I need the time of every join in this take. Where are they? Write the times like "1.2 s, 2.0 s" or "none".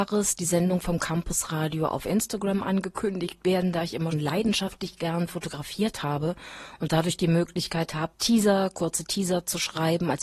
4.1 s, 8.1 s